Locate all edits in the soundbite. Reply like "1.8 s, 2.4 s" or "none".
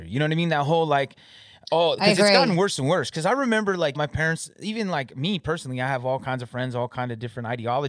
3.9 s